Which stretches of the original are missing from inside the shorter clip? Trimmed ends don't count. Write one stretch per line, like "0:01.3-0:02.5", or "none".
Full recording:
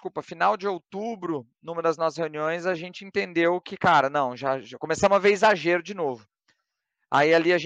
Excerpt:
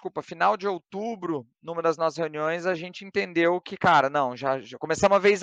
none